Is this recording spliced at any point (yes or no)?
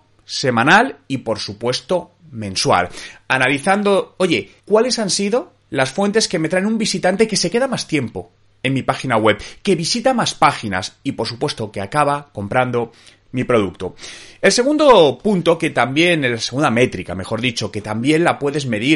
yes